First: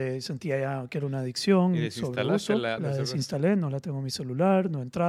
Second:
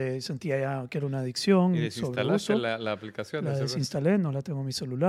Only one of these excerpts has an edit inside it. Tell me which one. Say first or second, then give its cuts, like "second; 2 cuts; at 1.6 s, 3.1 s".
first; 1 cut; at 2.8 s